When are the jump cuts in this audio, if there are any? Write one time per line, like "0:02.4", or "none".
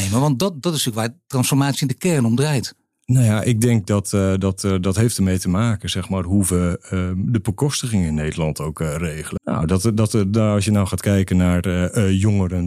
0:09.4